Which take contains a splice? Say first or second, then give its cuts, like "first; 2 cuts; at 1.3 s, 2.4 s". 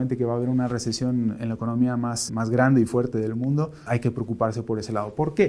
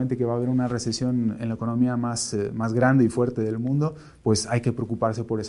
first; 2 cuts; at 2.3 s, 3.9 s